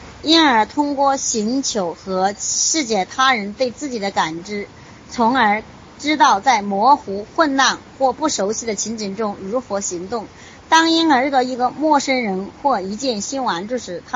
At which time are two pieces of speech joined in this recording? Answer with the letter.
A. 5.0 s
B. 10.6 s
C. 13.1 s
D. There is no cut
D